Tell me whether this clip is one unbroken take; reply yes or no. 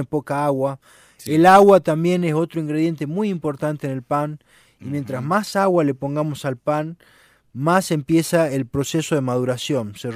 yes